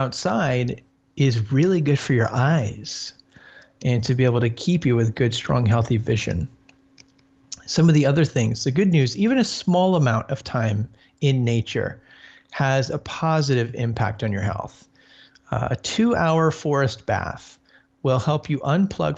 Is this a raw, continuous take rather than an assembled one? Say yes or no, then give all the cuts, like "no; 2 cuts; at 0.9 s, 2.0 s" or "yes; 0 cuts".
yes; 0 cuts